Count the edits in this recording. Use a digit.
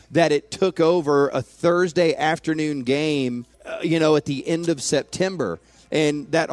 1